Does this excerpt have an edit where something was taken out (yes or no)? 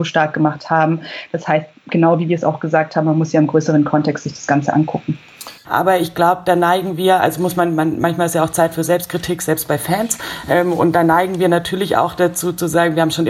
yes